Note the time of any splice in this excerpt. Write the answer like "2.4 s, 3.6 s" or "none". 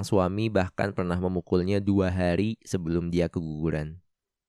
none